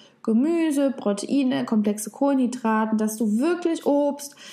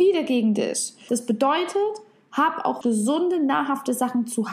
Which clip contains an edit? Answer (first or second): second